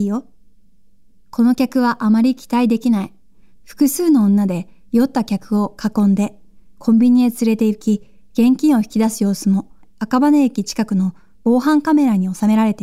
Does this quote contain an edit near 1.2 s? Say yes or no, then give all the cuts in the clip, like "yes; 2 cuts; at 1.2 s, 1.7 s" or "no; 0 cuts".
no; 1 cut; at 3.5 s